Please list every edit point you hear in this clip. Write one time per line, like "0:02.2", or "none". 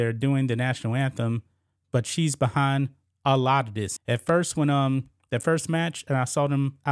0:04.0